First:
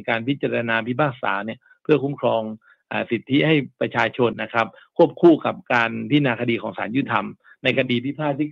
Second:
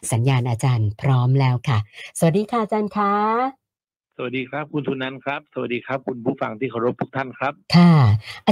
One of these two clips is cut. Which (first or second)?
first